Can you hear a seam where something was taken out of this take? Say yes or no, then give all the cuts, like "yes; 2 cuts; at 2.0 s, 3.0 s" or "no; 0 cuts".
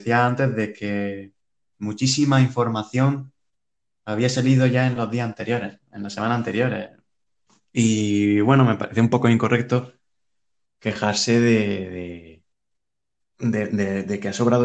no; 0 cuts